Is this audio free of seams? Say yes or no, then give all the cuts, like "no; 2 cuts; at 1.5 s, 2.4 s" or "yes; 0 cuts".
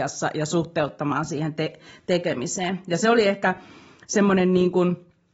yes; 0 cuts